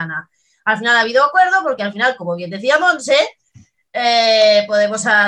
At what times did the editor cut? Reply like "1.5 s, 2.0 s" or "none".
none

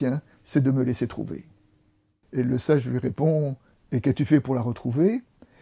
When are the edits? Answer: 2.2 s

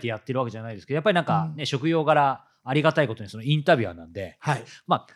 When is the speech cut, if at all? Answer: none

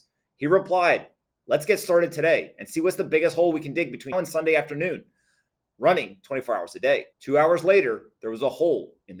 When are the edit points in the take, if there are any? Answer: 4.1 s, 7.1 s

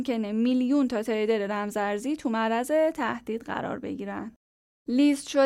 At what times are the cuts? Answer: none

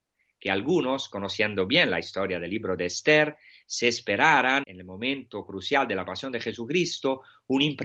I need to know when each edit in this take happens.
4.6 s

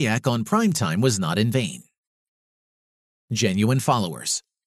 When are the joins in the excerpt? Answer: none

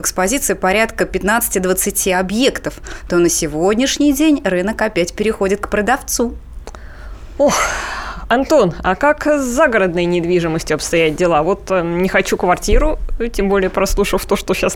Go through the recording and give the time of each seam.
none

